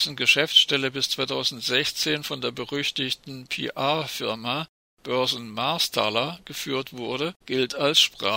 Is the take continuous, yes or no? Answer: no